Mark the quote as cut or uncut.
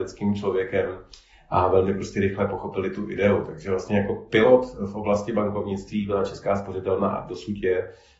uncut